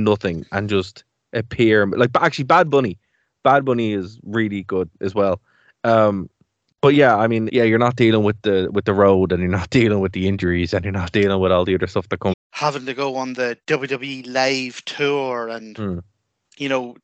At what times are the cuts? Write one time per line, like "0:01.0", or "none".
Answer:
0:07.5
0:12.3